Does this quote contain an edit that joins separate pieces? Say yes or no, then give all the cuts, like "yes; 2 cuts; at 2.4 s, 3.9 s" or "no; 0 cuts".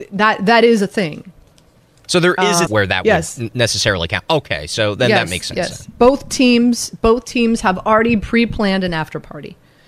yes; 1 cut; at 2.7 s